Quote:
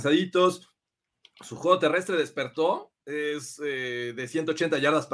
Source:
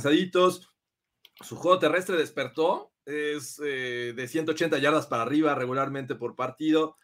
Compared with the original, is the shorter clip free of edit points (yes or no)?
yes